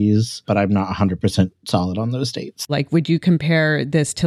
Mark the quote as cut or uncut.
cut